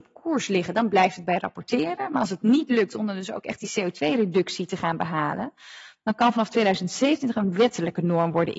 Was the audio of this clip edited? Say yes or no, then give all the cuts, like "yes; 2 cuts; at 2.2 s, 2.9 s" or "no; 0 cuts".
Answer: no; 0 cuts